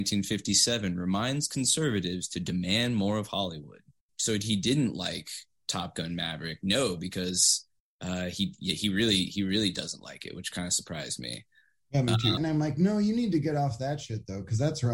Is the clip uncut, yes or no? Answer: no